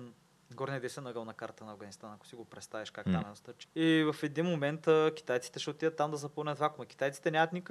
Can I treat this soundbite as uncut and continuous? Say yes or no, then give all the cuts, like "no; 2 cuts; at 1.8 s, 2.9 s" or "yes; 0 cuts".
no; 1 cut; at 3.6 s